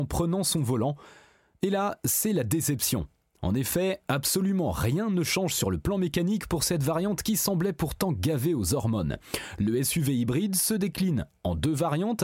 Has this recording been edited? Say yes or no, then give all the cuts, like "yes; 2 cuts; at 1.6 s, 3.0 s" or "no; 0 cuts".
no; 0 cuts